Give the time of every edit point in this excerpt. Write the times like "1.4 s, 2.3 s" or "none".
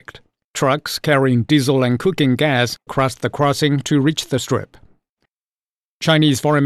2.9 s

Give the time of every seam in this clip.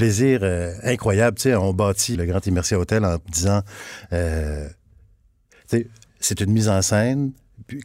2.1 s

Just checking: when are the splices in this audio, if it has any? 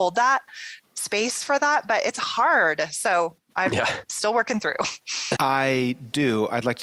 4.1 s, 5.3 s

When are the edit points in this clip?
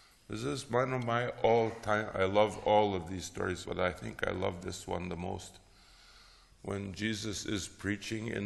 3.6 s

